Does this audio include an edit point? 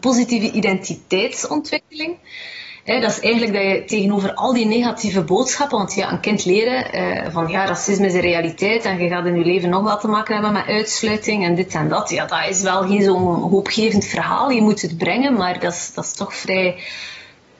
no; 0 cuts

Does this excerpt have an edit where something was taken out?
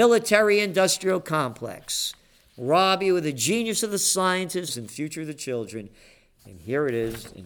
yes; 2 cuts; at 4.7 s, 6.4 s

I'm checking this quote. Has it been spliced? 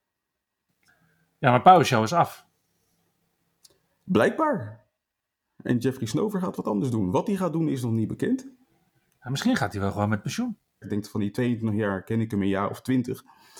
yes; 1 cut; at 10.8 s

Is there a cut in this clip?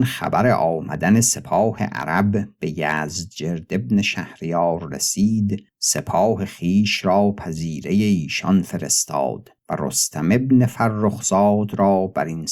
yes; 2 cuts; at 5.7 s, 9.6 s

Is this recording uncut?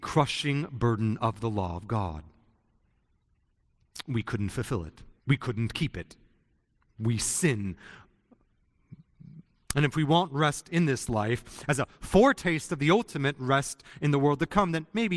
no; 2 cuts; at 5.2 s, 9.7 s

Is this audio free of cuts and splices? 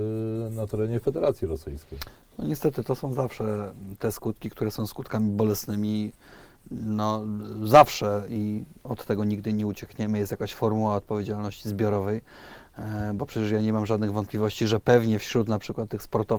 yes; 0 cuts

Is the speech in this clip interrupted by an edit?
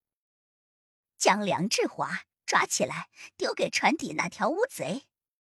no; 0 cuts

